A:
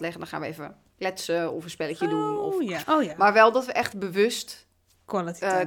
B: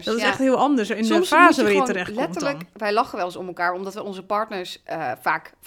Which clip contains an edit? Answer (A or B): A